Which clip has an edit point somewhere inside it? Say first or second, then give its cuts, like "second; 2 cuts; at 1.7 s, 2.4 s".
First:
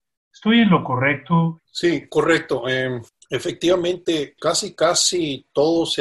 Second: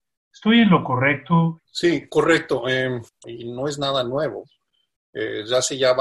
second; 1 cut; at 3.2 s